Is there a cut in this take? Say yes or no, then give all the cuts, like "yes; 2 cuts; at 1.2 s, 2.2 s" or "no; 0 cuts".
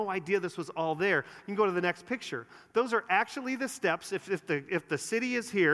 no; 0 cuts